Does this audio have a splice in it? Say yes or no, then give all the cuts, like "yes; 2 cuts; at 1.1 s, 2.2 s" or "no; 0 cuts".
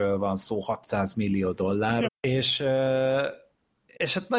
yes; 1 cut; at 2.1 s